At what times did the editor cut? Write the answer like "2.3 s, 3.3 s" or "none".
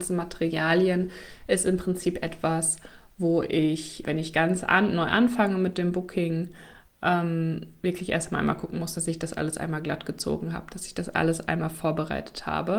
4.0 s